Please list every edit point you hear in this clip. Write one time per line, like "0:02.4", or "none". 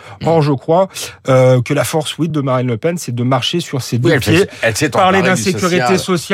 none